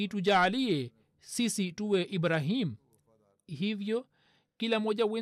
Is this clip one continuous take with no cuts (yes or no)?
yes